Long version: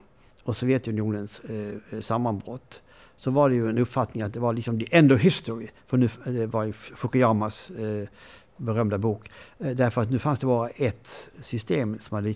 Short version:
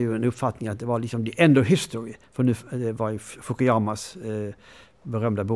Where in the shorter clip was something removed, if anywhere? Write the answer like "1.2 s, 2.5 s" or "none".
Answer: none